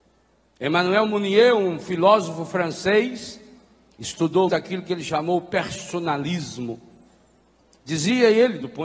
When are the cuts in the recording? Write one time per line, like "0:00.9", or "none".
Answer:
0:04.5